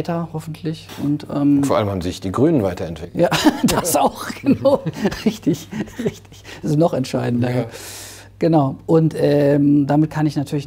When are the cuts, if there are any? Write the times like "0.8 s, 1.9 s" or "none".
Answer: none